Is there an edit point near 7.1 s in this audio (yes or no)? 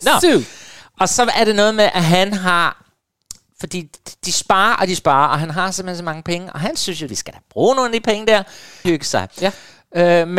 yes